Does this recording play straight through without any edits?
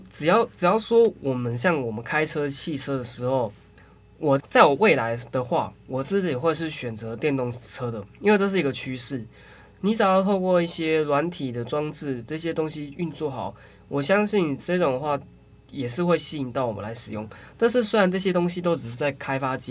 no; 1 cut; at 4.4 s

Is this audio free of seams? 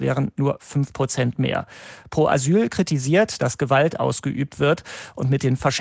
no; 1 cut; at 3.4 s

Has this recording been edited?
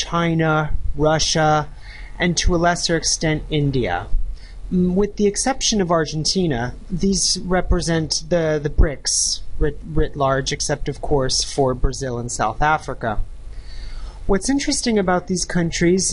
no; 0 cuts

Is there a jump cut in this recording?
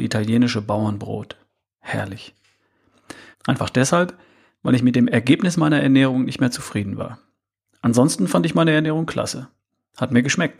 yes; 1 cut; at 3.3 s

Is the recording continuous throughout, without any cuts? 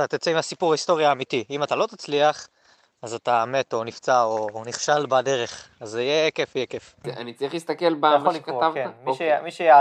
yes; 0 cuts

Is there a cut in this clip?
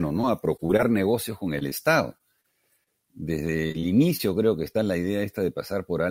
no; 0 cuts

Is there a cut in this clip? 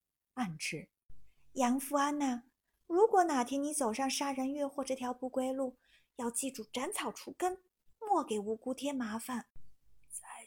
yes; 1 cut; at 9.5 s

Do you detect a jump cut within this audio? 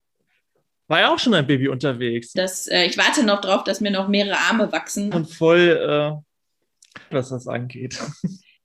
yes; 3 cuts; at 2.4 s, 5.1 s, 7.1 s

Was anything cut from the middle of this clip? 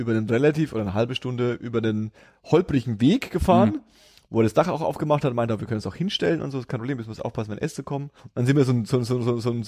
yes; 1 cut; at 8.2 s

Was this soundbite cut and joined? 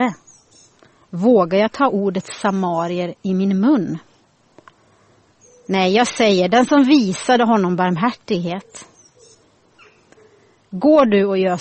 no; 0 cuts

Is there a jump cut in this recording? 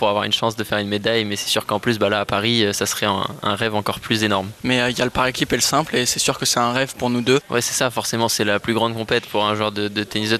yes; 1 cut; at 4.6 s

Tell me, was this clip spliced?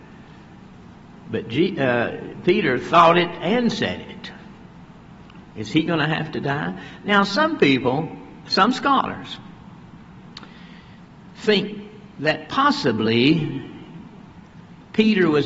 yes; 1 cut; at 5.4 s

